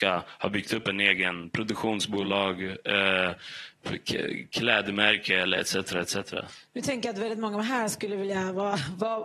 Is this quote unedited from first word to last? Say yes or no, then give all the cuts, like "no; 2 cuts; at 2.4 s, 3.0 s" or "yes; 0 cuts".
yes; 0 cuts